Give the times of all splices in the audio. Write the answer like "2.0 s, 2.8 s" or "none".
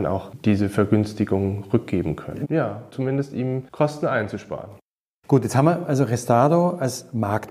2.4 s